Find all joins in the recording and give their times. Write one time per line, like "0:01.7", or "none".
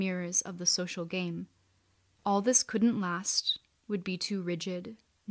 0:02.2

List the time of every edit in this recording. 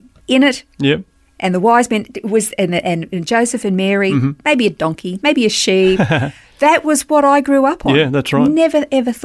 none

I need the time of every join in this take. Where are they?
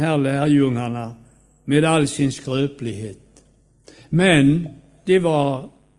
0:05.0

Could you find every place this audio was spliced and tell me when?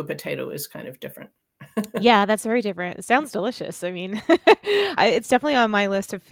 0:05.0

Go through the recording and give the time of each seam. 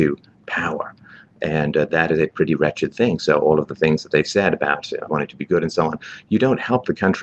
0:05.1

